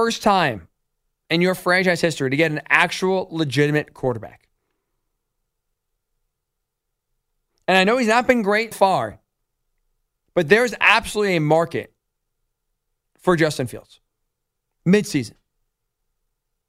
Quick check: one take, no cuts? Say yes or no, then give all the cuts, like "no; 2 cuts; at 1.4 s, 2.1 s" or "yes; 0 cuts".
no; 1 cut; at 8.7 s